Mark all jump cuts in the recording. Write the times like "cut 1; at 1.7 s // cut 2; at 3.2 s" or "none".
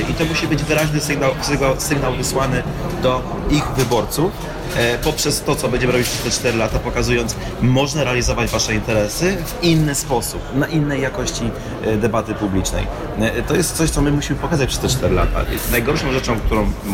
none